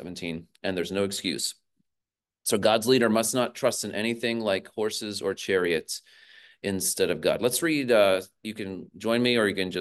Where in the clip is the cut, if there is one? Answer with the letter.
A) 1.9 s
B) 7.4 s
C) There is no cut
C